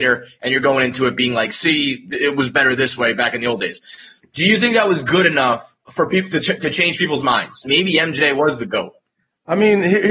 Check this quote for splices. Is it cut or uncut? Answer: cut